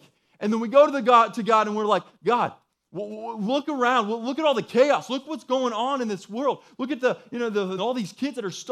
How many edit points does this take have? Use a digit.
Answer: 2